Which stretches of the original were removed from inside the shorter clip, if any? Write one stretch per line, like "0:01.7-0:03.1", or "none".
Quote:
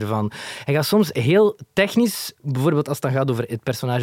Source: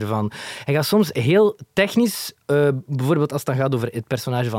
0:02.4-0:02.8